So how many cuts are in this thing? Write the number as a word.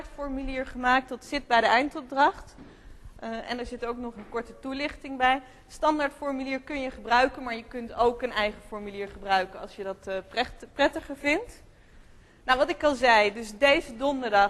zero